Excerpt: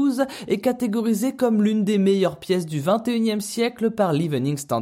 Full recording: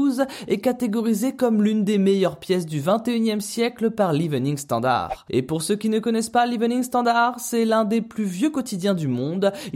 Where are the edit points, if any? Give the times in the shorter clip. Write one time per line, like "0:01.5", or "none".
none